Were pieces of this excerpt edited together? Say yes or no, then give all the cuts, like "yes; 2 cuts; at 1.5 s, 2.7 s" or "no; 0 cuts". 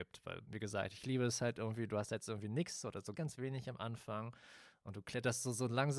yes; 1 cut; at 3.1 s